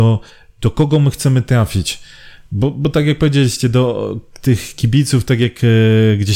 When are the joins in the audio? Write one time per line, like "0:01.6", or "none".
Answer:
none